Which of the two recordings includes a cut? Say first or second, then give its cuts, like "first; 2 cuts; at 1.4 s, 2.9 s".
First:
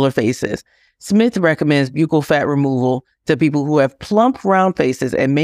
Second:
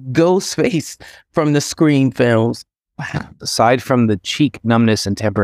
second; 1 cut; at 3.4 s